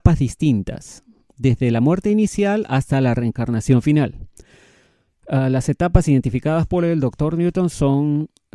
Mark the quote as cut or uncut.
uncut